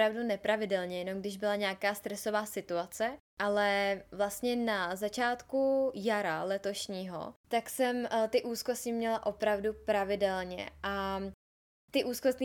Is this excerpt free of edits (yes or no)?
no